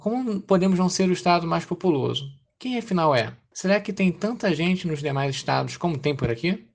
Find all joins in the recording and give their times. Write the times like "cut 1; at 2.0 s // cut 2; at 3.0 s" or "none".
cut 1; at 3.5 s